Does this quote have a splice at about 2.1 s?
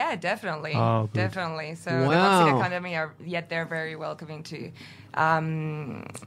no; 0 cuts

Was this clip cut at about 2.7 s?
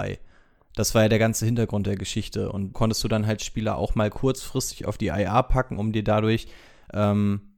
yes; 1 cut; at 2.7 s

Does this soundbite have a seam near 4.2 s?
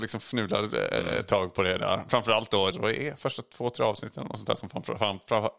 no; 1 cut; at 2.7 s

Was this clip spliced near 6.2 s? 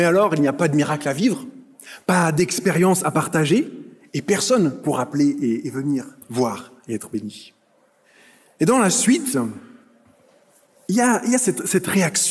yes; 1 cut; at 6.2 s

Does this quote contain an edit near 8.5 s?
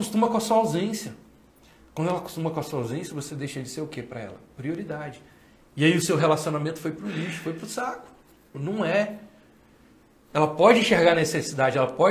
yes; 1 cut; at 8.5 s

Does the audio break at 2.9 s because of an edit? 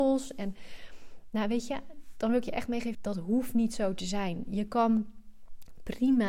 yes; 1 cut; at 2.9 s

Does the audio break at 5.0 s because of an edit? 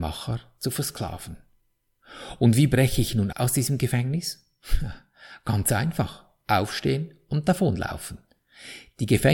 no; 1 cut; at 3.3 s

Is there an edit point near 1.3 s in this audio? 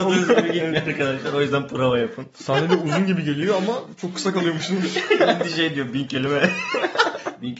no; 0 cuts

